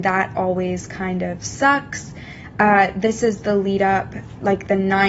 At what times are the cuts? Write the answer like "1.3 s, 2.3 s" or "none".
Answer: none